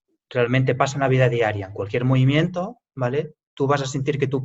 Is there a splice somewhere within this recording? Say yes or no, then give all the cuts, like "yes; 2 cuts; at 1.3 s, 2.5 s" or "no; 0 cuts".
no; 0 cuts